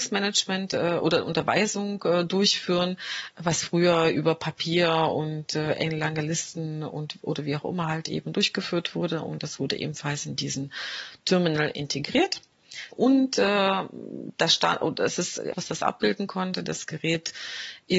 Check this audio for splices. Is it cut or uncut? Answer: cut